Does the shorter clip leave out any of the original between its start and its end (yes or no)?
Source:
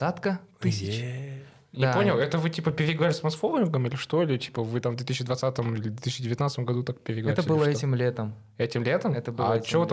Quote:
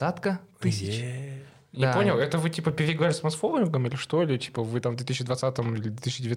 no